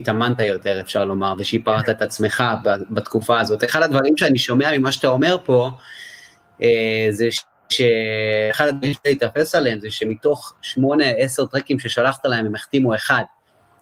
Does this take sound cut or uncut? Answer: uncut